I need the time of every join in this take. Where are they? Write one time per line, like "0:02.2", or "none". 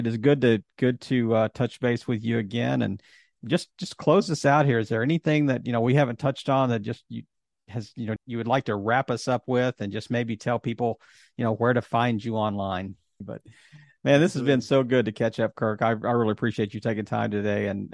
0:08.2
0:13.2